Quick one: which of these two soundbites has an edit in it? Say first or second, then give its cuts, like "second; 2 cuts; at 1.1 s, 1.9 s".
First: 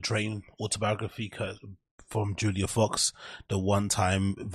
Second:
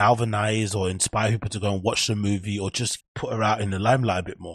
second; 1 cut; at 3.0 s